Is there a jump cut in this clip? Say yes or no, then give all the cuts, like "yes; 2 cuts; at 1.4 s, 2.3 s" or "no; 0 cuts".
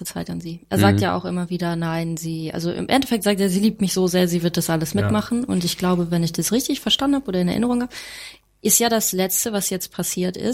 no; 0 cuts